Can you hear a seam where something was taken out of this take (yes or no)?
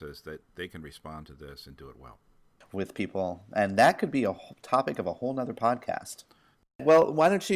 yes